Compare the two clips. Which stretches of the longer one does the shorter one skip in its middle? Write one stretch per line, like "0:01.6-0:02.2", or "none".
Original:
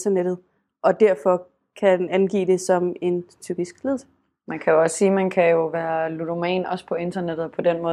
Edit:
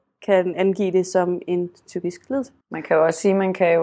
0:04.1-0:04.4